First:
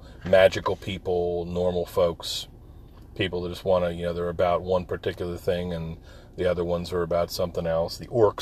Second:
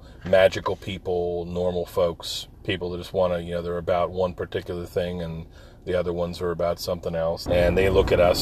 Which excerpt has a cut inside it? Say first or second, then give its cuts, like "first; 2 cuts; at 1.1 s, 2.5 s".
second; 2 cuts; at 2.5 s, 7.5 s